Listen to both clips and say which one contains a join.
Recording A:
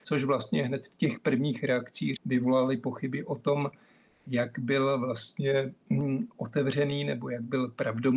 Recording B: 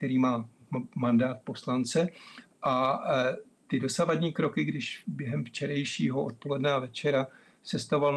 A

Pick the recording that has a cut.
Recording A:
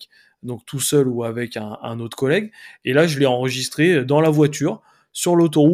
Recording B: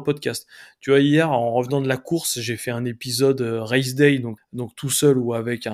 B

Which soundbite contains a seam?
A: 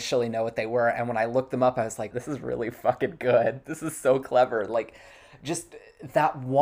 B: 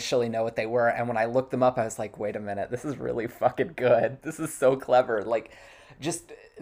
A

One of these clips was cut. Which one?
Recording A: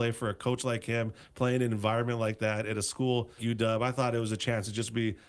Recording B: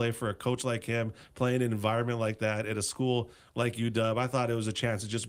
A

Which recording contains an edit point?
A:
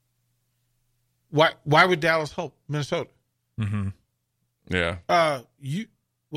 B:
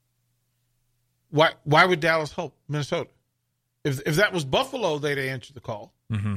A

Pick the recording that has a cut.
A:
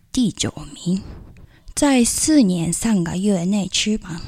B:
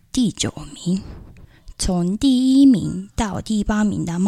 A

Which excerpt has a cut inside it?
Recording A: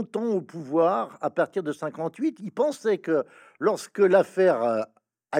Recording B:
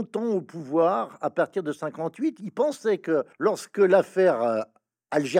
B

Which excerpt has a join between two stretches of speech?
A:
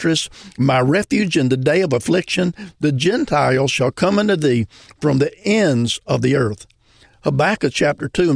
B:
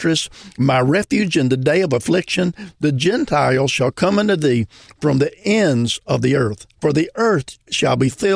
B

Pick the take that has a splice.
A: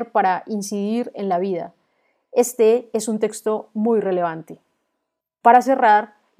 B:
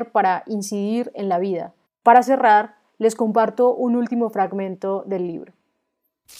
B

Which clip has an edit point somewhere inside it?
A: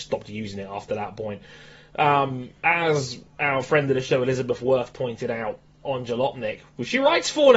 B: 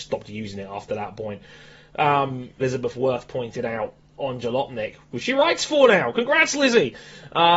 B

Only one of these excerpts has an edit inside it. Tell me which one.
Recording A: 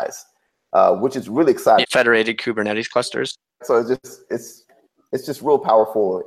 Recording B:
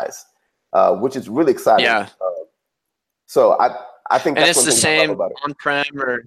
A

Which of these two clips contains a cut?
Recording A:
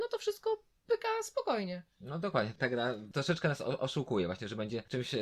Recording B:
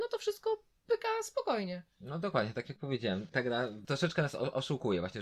A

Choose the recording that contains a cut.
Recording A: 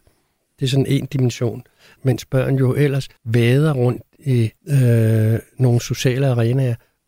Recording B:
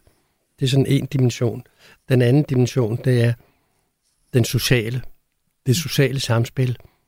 A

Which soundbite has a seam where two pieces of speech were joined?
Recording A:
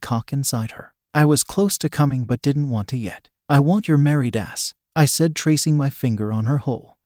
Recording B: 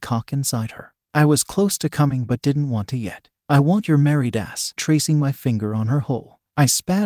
B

